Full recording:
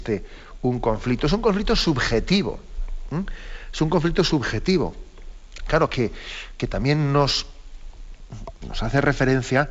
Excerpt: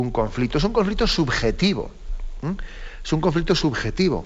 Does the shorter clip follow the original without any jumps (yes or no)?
yes